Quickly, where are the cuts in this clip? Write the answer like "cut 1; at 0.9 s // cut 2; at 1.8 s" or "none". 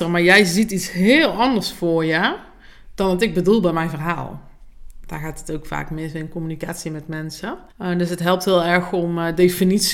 cut 1; at 7.7 s